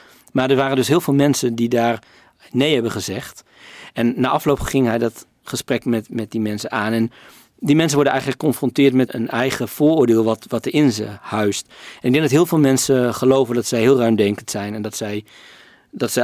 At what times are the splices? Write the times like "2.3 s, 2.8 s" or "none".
9.1 s

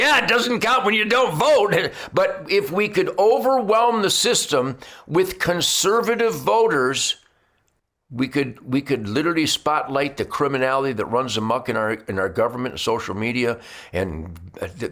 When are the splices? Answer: none

